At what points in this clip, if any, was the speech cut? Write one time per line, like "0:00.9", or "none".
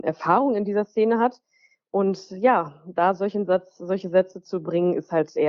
none